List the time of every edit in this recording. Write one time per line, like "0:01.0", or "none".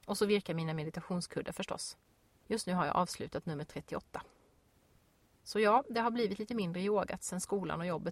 none